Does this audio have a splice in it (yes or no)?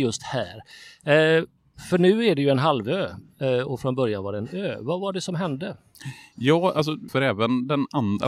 yes